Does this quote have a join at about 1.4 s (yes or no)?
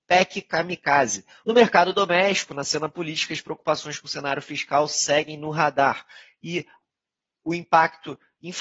yes